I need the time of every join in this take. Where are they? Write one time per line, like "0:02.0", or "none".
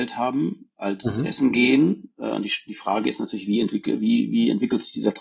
none